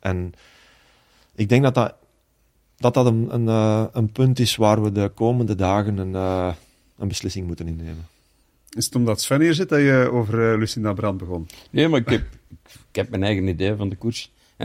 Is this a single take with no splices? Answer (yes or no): yes